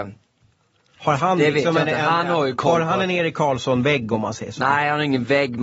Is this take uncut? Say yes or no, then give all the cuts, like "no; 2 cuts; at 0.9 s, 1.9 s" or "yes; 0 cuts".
yes; 0 cuts